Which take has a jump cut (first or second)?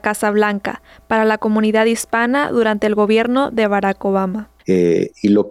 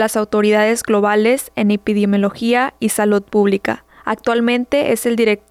first